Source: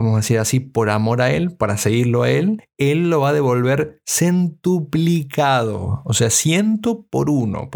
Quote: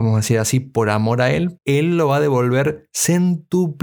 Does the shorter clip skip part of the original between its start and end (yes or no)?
yes